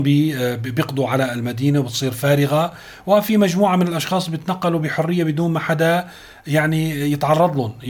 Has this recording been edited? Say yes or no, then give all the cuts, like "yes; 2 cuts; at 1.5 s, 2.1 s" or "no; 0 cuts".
no; 0 cuts